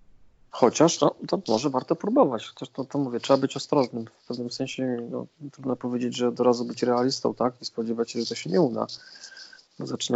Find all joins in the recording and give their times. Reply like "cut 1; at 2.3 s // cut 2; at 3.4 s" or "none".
none